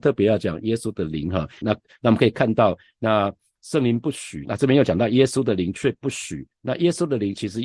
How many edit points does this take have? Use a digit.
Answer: 1